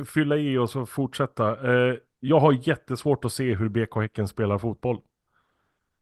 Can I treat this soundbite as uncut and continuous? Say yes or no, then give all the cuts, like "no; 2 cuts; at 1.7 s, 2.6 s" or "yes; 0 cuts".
yes; 0 cuts